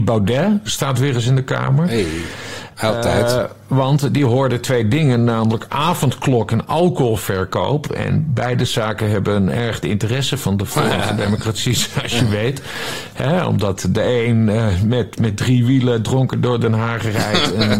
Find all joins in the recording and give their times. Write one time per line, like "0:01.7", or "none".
none